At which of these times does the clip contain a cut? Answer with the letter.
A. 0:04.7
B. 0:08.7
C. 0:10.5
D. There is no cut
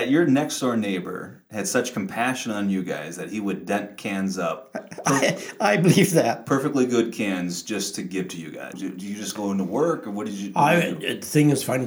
B